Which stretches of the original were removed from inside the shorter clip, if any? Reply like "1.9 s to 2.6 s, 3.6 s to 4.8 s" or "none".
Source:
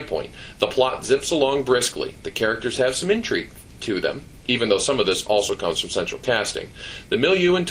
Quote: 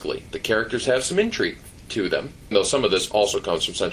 4.4 s to 4.7 s